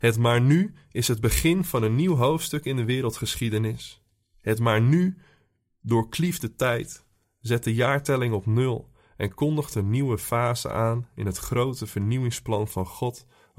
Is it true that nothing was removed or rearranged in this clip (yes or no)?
yes